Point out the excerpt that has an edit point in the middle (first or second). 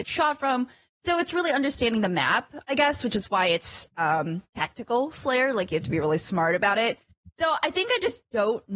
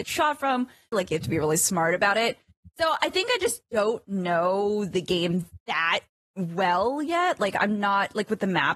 second